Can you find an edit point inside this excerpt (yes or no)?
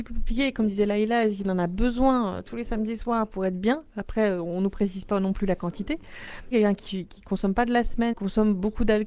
yes